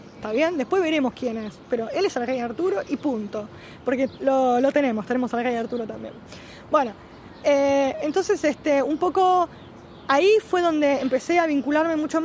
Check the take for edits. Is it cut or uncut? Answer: cut